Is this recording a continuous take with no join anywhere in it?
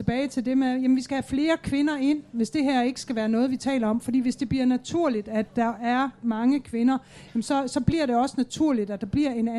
yes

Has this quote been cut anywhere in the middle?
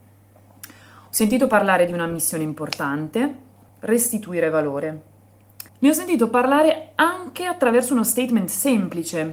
yes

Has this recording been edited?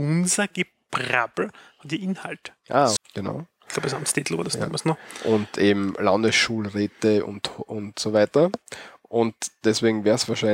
yes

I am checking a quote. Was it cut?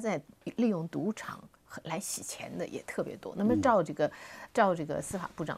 no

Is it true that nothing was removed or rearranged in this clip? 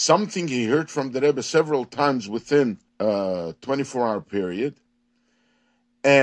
no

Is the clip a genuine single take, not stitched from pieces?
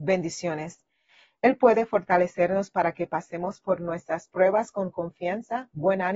yes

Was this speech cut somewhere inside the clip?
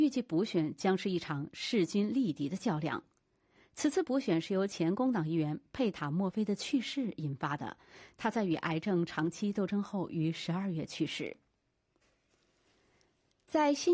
no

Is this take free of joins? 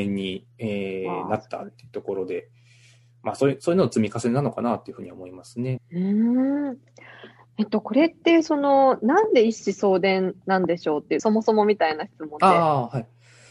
no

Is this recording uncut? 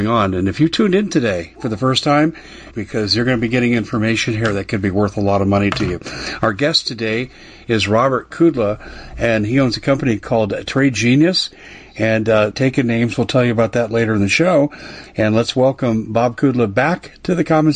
no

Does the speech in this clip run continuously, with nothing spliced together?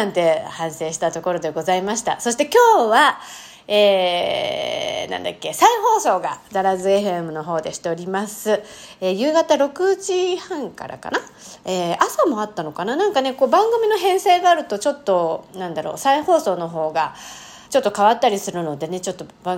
no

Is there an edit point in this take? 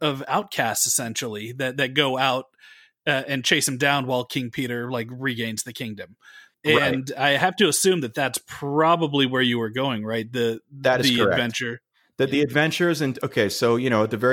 no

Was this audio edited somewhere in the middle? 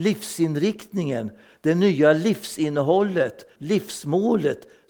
yes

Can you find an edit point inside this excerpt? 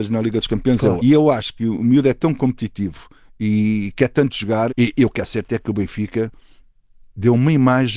yes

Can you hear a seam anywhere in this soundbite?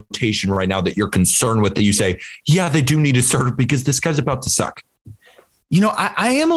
no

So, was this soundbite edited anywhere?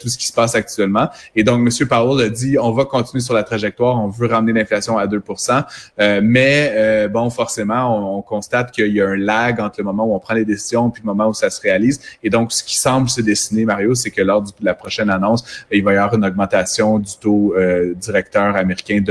no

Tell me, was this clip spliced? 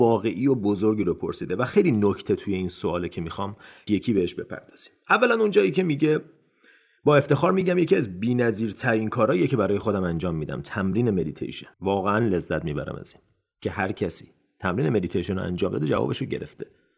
yes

